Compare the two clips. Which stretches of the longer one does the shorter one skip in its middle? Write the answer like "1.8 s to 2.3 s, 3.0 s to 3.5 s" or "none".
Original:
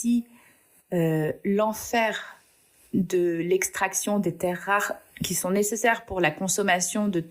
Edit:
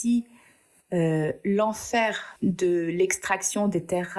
2.4 s to 2.9 s